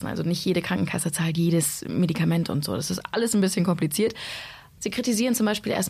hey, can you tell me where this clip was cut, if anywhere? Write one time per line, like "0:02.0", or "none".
0:04.8